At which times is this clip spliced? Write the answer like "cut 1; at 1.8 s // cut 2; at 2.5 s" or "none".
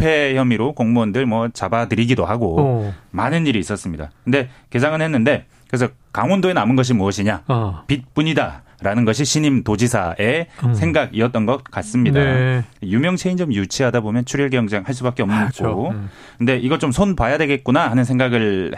cut 1; at 15.5 s